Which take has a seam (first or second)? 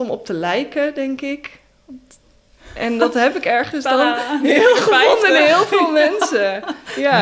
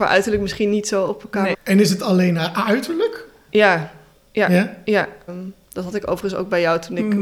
second